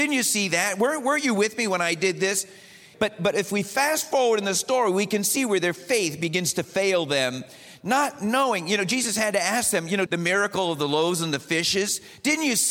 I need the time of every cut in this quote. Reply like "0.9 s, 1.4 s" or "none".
2.9 s, 10.1 s